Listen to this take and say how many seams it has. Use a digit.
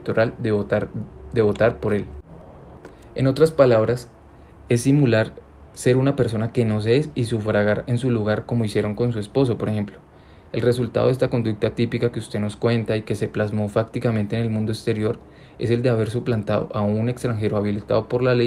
0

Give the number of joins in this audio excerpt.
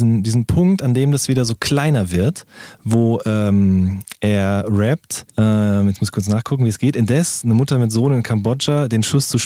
1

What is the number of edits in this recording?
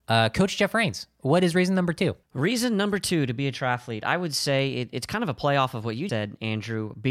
2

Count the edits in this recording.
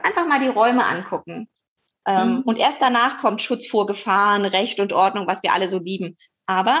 1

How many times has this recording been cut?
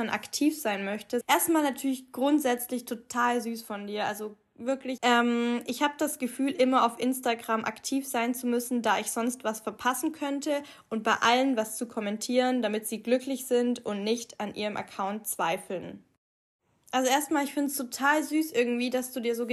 2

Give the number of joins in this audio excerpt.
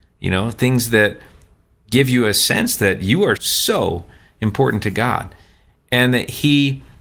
1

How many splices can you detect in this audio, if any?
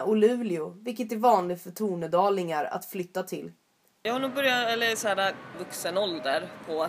2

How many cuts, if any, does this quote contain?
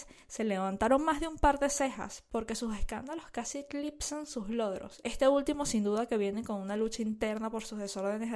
1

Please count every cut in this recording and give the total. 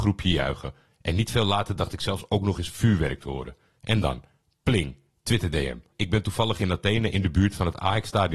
1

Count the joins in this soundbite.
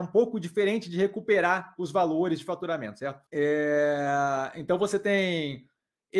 1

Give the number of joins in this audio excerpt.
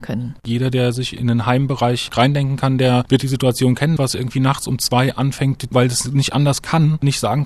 2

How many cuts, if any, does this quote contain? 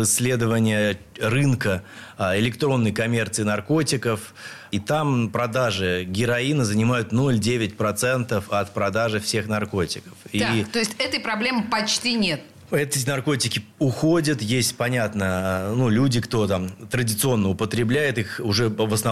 0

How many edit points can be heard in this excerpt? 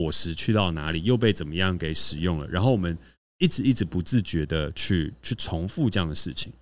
0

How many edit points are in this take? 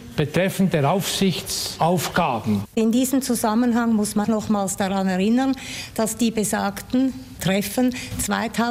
2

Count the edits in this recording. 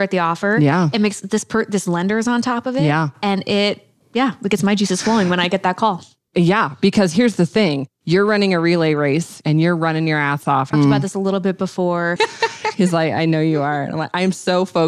3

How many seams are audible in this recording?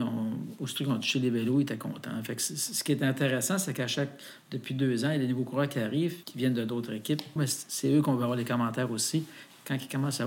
2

